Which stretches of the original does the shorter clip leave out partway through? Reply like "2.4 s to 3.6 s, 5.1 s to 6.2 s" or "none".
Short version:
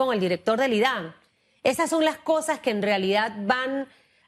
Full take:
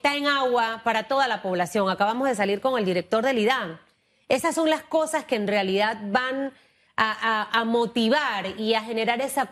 none

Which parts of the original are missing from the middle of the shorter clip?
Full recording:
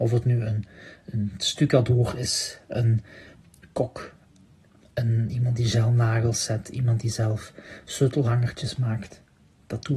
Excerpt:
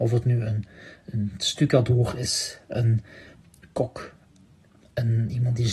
none

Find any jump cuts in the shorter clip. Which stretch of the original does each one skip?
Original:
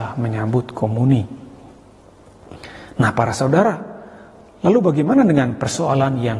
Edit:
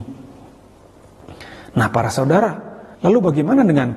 4.2 s to 4.6 s

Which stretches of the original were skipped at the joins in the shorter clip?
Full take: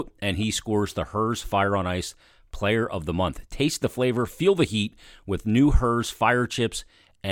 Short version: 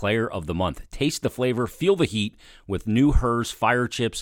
none

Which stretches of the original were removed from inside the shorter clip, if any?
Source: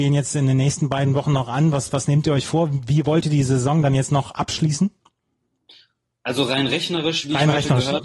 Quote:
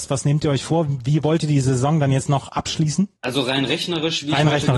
5.0 s to 6.2 s

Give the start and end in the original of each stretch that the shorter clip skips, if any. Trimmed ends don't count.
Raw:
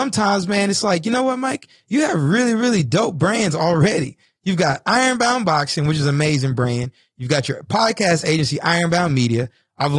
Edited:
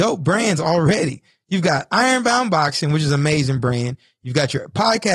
none

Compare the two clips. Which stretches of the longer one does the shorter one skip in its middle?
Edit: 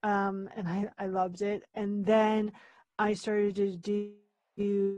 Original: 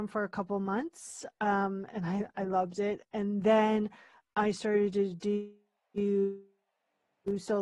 none

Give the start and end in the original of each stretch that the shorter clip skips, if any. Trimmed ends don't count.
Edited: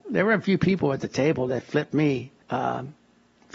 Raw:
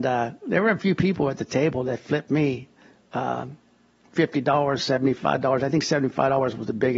2.8 s to 3.1 s

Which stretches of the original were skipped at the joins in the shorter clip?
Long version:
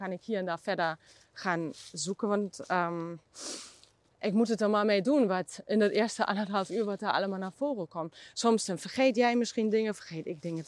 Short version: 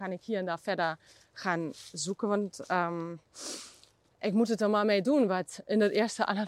none

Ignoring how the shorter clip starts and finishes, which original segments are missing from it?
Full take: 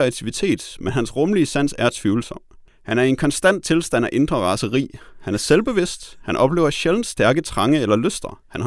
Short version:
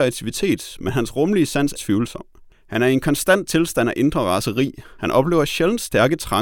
1.8 s to 1.9 s, 5.1 s to 6.2 s

